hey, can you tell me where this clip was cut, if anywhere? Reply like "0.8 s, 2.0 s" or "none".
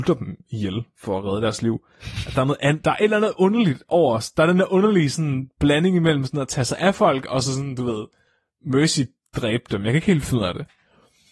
none

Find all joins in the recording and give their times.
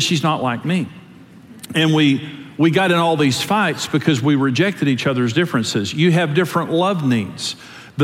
none

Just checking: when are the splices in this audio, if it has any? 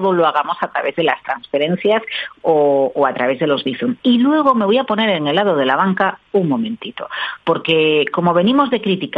none

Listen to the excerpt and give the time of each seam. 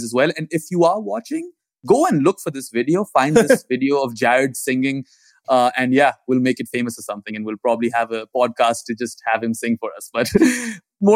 none

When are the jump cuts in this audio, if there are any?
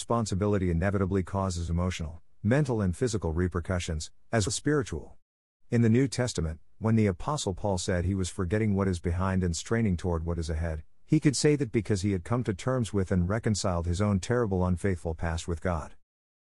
4.5 s

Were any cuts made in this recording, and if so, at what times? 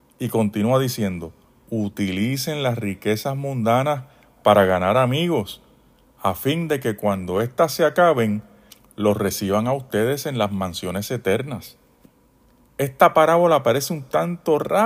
1.5 s

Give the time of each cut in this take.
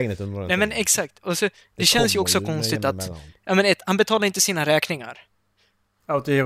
none

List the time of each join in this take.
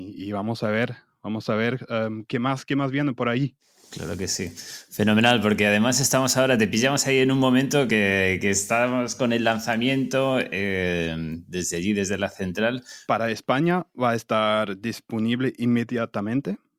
13.1 s

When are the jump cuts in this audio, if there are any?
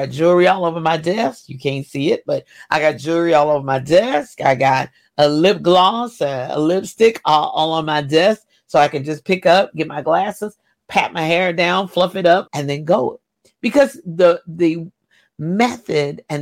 12.5 s

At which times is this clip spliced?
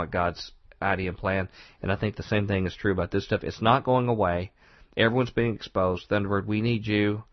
none

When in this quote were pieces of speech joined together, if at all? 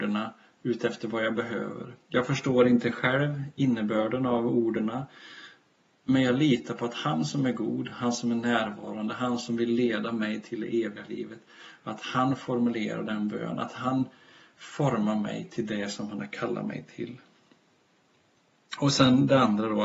none

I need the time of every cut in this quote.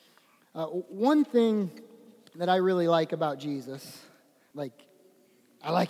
4.5 s

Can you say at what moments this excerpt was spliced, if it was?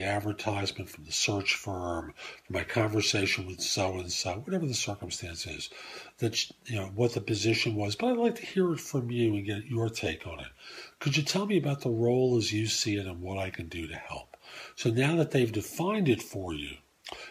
none

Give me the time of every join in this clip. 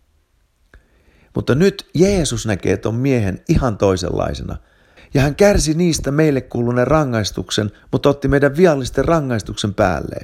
5.0 s, 7.8 s

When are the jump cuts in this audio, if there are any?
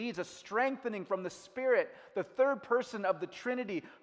none

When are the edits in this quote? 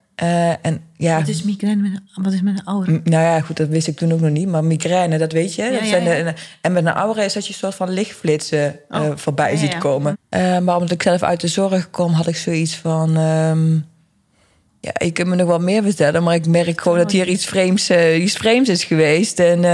10.1 s

